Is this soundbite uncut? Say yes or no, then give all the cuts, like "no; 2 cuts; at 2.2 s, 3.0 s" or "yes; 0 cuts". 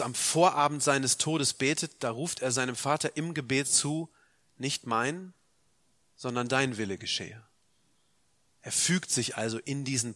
yes; 0 cuts